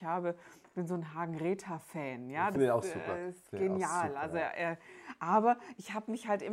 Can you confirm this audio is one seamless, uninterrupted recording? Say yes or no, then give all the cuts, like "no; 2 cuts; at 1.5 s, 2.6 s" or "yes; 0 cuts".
yes; 0 cuts